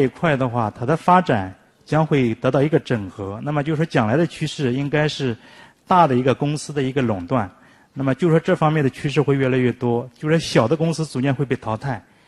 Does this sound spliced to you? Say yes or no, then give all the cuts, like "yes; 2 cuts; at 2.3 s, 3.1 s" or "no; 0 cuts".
no; 0 cuts